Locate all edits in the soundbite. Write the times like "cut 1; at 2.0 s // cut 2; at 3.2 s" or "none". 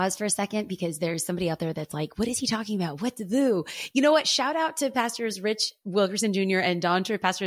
none